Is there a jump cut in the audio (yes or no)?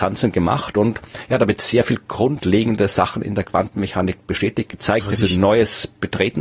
no